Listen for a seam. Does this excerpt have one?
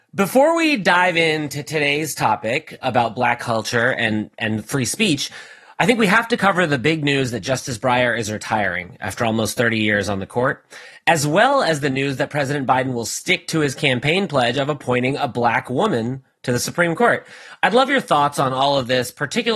yes; 1 cut; at 2.8 s

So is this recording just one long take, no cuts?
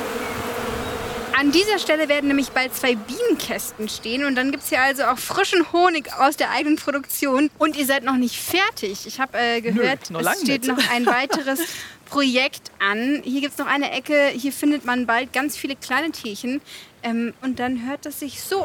no; 1 cut; at 7.5 s

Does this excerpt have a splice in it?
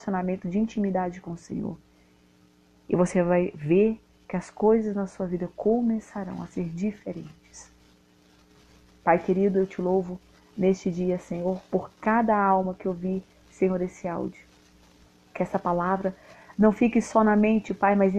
yes; 1 cut; at 8.9 s

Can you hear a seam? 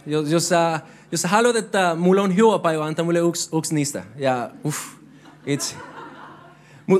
no; 0 cuts

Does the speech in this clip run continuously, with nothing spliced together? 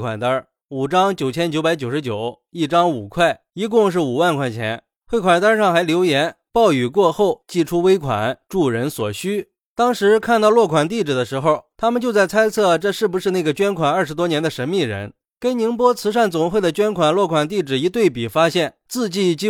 yes; 0 cuts

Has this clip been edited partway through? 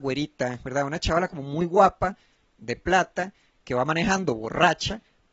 no; 0 cuts

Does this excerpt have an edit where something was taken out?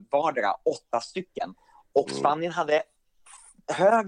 no; 0 cuts

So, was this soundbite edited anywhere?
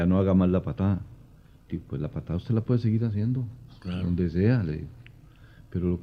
no; 0 cuts

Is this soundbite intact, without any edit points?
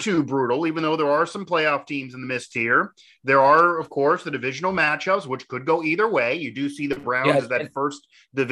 yes; 0 cuts

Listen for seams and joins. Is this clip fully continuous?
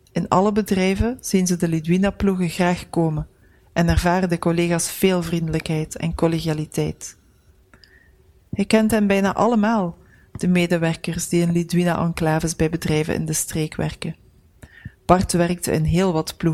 yes; 0 cuts

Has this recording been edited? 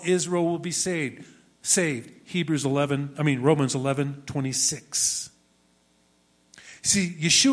no; 0 cuts

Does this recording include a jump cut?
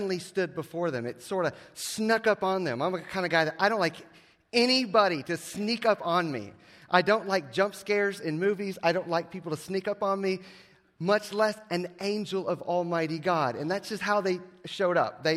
no; 0 cuts

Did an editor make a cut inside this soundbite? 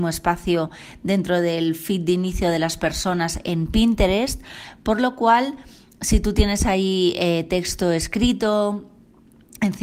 no; 0 cuts

